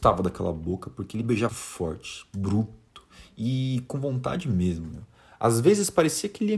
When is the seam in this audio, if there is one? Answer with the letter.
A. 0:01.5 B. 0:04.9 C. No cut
A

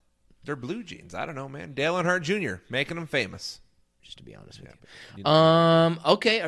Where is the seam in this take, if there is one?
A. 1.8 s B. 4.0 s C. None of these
B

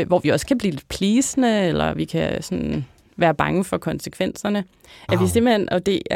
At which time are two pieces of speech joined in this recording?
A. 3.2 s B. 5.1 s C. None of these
B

